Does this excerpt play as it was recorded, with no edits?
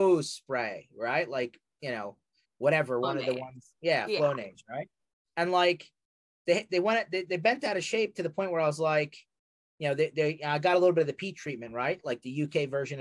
yes; 0 cuts

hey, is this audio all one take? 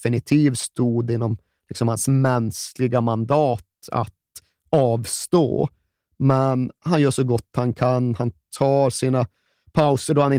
yes; 0 cuts

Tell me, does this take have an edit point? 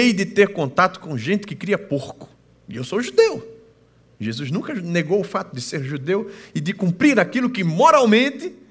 no; 0 cuts

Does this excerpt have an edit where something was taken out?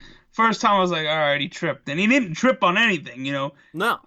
yes; 1 cut; at 1.8 s

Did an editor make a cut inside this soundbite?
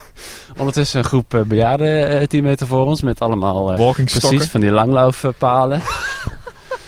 yes; 1 cut; at 3.8 s

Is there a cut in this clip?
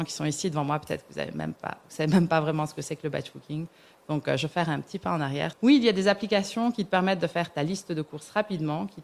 yes; 1 cut; at 5.5 s

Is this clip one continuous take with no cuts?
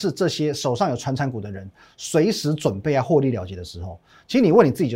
yes; 0 cuts

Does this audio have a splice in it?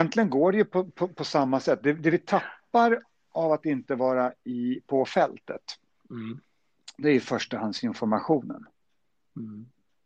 no; 0 cuts

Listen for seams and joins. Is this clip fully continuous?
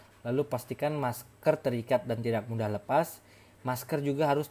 yes; 0 cuts

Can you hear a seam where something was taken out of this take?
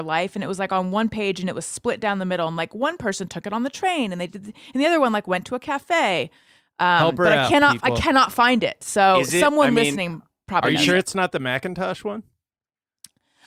no; 0 cuts

